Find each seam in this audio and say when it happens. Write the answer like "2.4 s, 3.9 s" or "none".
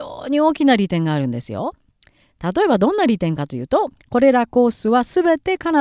4.0 s